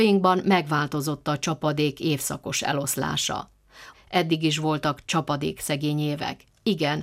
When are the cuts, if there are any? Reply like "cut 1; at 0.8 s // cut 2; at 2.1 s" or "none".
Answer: cut 1; at 3.9 s